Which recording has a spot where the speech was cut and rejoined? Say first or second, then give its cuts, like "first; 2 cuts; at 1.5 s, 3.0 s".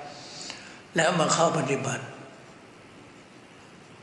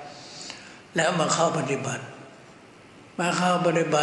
second; 1 cut; at 3.1 s